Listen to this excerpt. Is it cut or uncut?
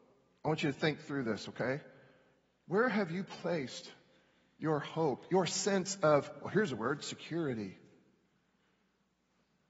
uncut